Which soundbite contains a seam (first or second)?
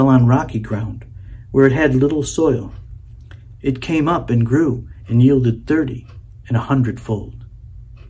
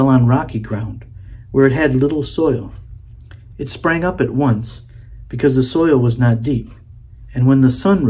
first